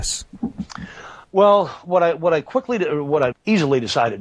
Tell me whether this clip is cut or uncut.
cut